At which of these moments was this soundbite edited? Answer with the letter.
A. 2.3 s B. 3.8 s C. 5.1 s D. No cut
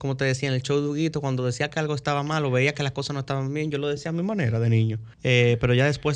C